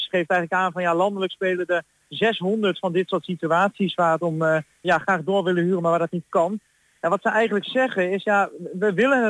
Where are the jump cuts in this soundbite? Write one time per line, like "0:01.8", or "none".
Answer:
0:04.8